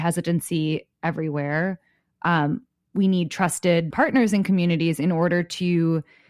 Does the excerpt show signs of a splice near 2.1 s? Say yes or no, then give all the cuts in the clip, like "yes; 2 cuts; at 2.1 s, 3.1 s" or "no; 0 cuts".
no; 0 cuts